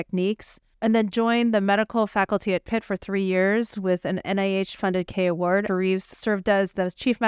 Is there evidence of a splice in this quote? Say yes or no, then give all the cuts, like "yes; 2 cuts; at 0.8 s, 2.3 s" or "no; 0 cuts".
yes; 1 cut; at 5.7 s